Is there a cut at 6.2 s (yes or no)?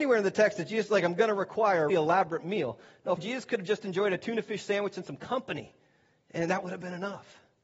no